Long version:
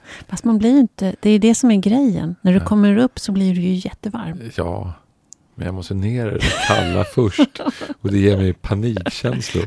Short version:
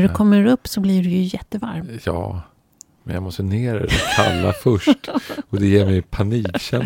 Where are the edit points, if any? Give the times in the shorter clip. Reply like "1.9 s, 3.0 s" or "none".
none